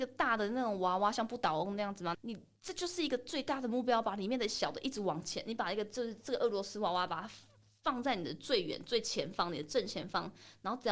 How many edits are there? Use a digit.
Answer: 1